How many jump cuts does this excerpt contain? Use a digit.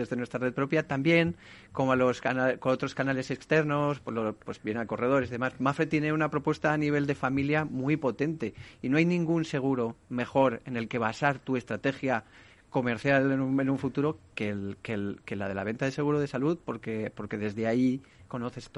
0